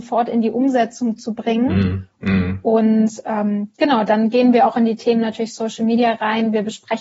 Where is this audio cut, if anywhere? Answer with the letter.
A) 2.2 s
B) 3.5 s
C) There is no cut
A